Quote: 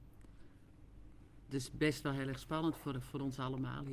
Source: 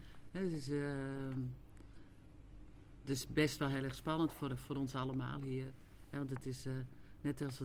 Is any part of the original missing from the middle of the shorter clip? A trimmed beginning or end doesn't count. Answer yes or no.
no